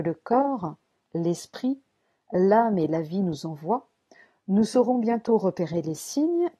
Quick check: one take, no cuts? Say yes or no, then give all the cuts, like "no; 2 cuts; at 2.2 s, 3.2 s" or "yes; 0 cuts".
yes; 0 cuts